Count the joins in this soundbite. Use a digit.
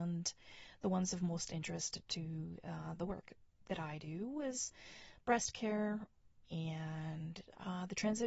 1